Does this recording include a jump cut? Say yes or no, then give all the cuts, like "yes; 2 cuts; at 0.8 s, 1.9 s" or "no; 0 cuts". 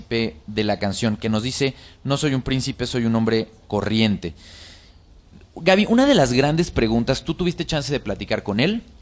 no; 0 cuts